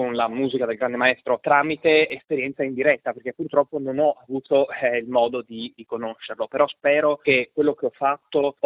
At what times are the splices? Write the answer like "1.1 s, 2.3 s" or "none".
none